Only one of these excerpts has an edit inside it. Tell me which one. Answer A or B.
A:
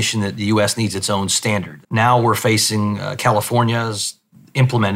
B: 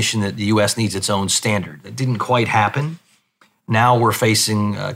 A